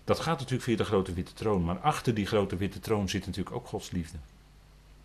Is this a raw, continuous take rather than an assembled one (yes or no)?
yes